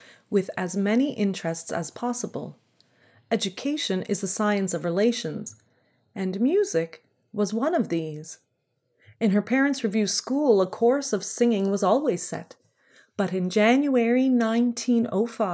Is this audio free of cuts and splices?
yes; 0 cuts

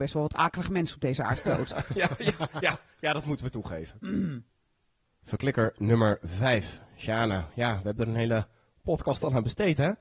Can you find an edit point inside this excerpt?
no; 0 cuts

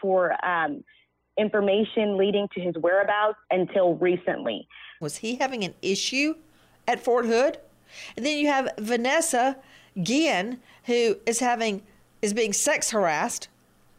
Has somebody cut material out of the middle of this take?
yes; 2 cuts; at 3.4 s, 5.0 s

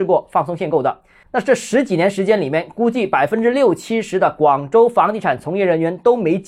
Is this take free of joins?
yes; 0 cuts

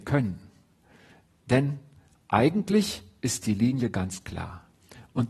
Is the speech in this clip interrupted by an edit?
no; 0 cuts

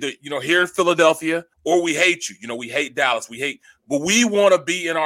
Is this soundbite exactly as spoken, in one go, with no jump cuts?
no; 1 cut; at 1.5 s

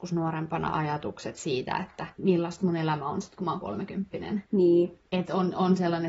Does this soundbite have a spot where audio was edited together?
no; 0 cuts

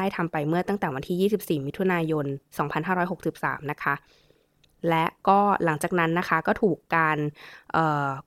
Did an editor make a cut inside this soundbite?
no; 0 cuts

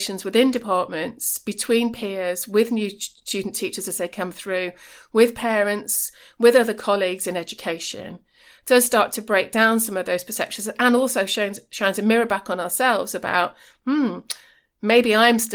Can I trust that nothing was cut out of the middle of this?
yes; 0 cuts

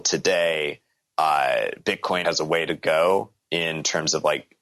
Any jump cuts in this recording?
yes; 1 cut; at 2.2 s

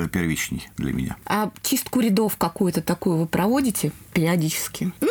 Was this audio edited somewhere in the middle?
no; 0 cuts

